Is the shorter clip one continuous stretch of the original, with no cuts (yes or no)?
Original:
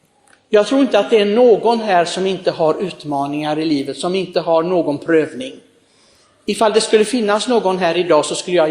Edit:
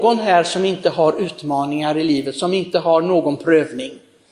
yes